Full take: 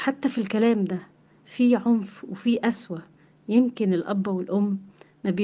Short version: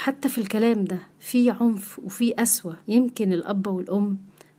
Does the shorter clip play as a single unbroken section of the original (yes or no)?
no